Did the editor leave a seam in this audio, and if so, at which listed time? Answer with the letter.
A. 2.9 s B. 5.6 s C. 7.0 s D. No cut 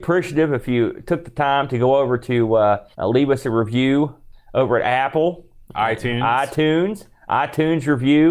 A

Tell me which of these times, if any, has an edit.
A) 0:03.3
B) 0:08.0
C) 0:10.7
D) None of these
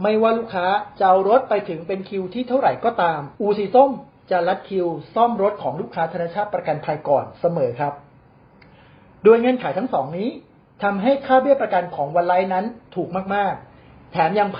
A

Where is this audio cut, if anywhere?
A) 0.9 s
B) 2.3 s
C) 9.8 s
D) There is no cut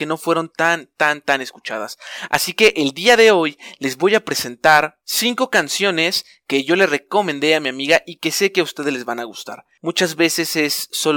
C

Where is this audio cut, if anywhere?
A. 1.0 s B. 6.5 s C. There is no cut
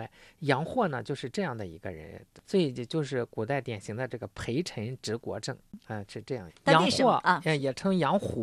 B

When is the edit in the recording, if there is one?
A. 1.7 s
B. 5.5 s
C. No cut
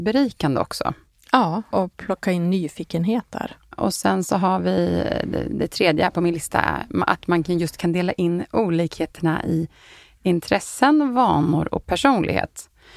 A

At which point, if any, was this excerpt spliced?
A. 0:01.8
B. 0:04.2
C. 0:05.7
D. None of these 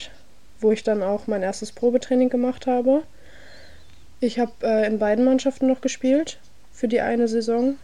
B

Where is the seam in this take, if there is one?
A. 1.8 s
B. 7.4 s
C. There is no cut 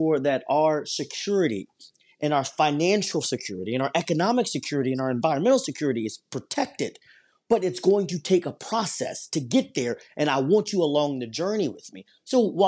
C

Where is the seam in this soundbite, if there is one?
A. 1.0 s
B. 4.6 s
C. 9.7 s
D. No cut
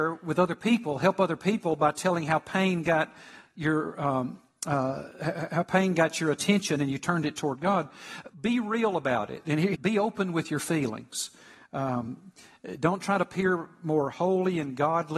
C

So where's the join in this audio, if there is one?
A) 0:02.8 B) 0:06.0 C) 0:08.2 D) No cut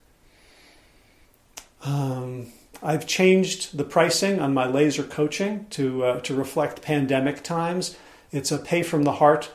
D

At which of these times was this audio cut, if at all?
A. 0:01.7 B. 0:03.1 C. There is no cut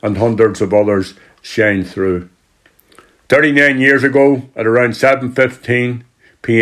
B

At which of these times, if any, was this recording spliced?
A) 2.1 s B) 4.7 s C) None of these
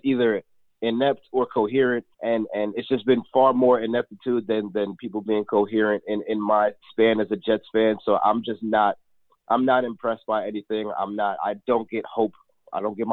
A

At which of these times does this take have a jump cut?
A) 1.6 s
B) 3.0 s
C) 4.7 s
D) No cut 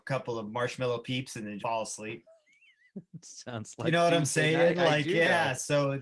A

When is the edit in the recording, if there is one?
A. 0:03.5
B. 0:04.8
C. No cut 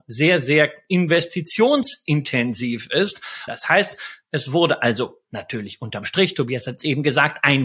A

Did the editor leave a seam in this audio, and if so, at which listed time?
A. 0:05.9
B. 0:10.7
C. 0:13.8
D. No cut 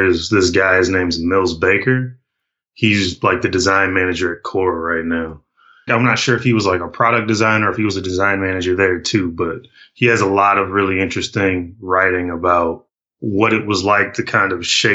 A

